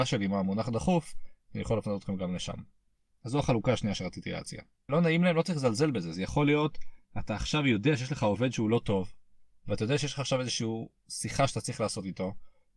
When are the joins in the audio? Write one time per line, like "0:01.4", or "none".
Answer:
0:04.9